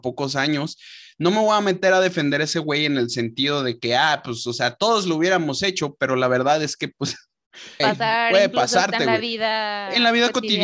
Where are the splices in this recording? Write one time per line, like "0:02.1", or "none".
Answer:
0:07.8